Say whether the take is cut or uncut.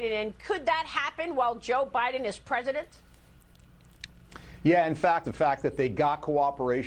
cut